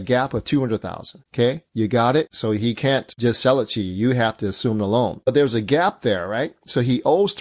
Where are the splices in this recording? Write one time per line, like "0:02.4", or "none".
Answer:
0:01.3
0:02.3

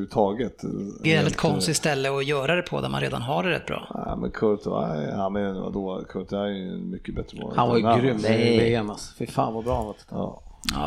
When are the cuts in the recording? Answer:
0:01.0

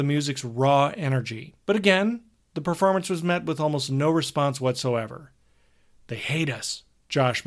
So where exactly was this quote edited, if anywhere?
0:01.6

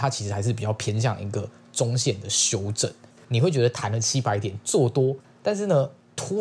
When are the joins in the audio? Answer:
0:03.2
0:05.2

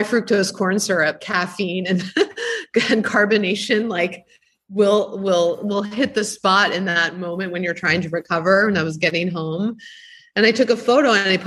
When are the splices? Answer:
none

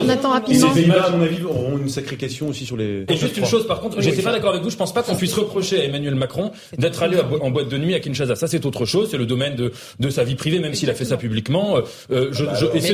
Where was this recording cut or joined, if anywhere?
0:03.1

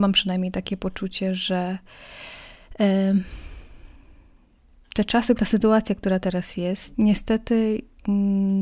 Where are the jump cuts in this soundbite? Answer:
0:05.4
0:06.9

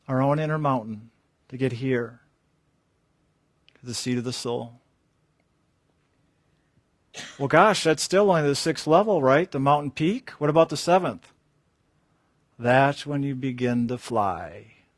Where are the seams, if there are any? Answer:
none

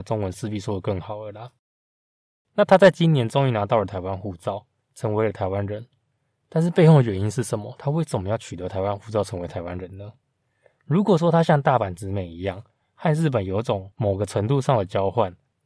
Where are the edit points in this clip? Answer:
none

